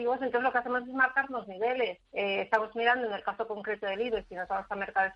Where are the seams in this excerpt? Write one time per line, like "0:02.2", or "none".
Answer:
0:02.0